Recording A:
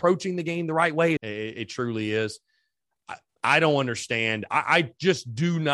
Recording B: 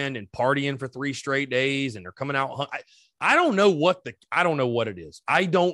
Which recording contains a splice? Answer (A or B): A